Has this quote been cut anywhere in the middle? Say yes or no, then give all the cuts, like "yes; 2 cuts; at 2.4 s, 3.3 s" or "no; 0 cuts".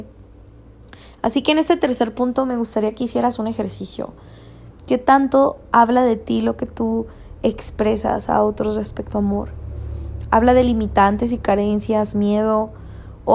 yes; 1 cut; at 4.7 s